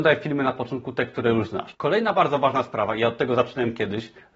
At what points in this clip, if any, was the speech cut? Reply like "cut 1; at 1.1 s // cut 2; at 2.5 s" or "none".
cut 1; at 1.7 s